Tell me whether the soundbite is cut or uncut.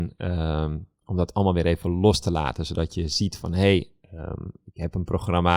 uncut